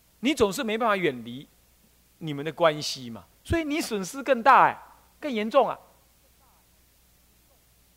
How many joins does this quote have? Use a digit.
1